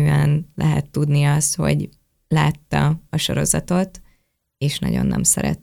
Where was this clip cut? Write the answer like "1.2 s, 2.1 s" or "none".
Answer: none